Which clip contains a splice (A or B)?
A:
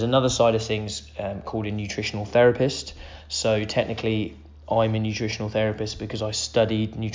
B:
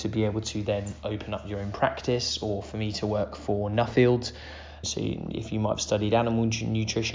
B